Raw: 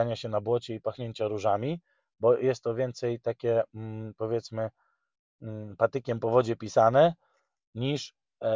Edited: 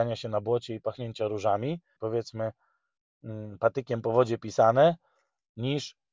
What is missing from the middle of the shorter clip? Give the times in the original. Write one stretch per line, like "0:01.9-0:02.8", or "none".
0:02.0-0:04.1